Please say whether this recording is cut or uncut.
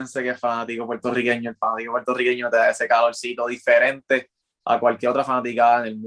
uncut